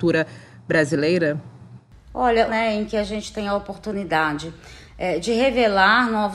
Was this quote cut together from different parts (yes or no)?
yes